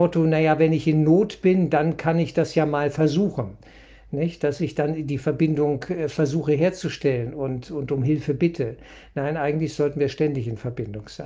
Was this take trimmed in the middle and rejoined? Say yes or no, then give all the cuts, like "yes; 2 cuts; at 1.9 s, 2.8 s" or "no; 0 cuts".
no; 0 cuts